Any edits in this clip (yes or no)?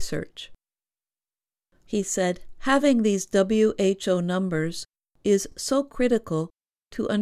no